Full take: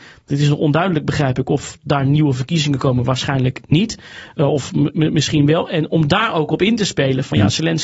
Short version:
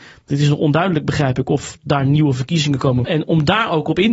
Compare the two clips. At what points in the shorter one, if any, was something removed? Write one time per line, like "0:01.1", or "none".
0:03.0